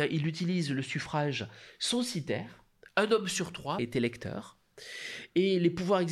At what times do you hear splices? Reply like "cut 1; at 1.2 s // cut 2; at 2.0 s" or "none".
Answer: cut 1; at 3.8 s